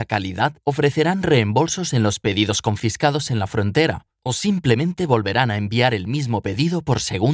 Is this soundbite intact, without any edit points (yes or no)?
yes